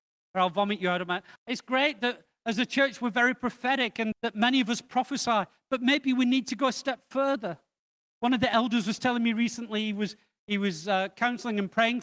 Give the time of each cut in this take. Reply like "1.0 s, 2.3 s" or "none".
1.4 s, 4.1 s

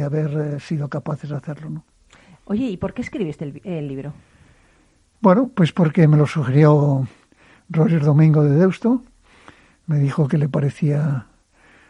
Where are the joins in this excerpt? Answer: none

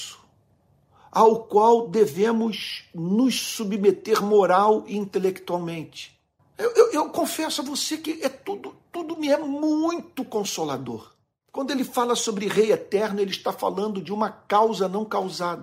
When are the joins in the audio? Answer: 6.4 s

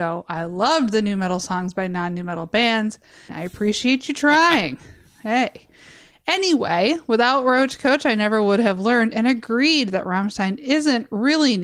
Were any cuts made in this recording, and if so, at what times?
3.3 s

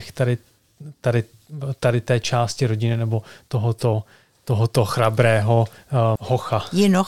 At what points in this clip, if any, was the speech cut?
6.2 s

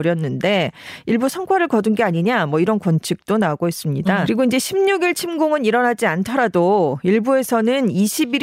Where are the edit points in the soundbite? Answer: 4.3 s

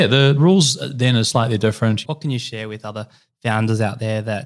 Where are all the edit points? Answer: 2.0 s

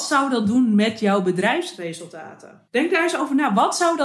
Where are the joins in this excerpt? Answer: 2.7 s

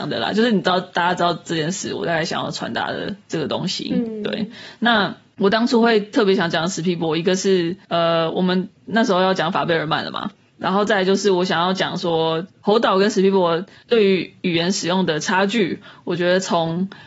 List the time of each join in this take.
none

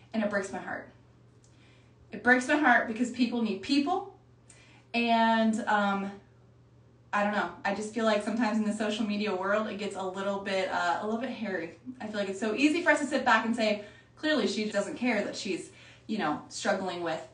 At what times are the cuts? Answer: 14.7 s

